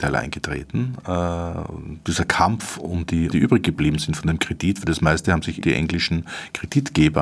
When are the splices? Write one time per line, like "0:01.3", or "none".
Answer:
0:03.3
0:05.6